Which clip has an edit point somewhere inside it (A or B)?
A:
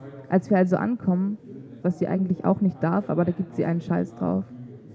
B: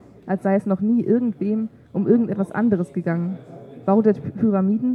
A